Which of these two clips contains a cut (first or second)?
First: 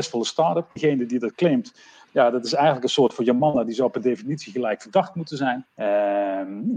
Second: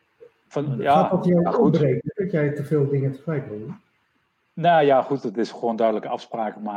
first